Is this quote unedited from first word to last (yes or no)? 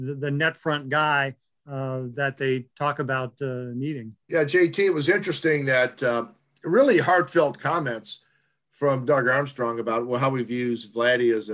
no